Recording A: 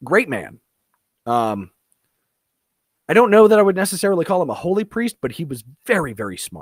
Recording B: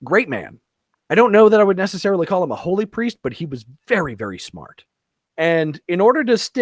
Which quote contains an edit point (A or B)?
B